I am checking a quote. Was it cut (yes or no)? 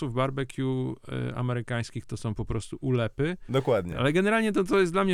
yes